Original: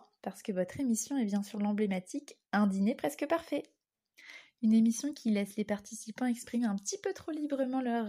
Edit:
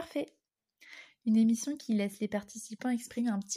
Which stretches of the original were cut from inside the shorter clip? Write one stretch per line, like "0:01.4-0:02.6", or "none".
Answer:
none